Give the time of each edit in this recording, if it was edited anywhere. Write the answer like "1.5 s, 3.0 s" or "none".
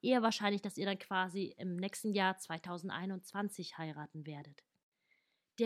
none